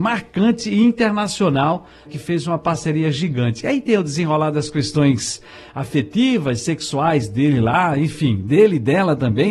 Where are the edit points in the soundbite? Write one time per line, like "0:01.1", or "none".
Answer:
0:02.1